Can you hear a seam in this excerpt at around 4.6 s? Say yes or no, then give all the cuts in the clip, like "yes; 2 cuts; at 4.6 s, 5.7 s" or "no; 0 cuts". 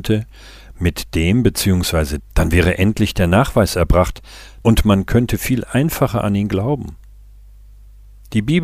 yes; 2 cuts; at 2.2 s, 4.6 s